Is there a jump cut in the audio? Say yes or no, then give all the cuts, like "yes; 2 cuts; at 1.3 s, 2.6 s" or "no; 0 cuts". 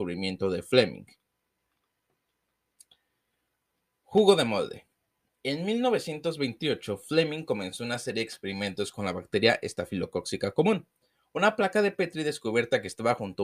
no; 0 cuts